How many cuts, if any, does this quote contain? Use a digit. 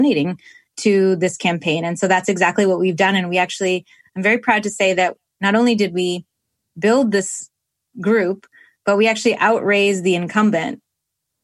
0